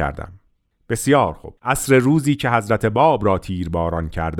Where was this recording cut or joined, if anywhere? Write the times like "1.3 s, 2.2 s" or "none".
1.6 s